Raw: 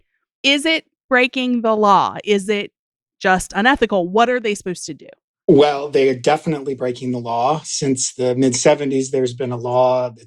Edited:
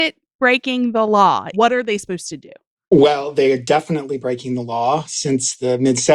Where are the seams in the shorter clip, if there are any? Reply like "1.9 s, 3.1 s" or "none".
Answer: 1.5 s